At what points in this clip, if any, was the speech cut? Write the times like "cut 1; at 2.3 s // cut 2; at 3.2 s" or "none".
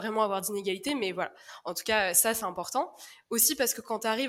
none